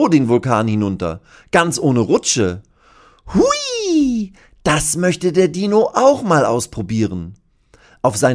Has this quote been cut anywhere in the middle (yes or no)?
no